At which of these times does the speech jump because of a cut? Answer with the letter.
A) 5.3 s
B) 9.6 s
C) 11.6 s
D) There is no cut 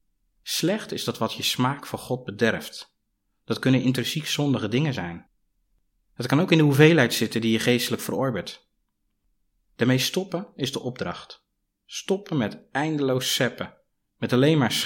D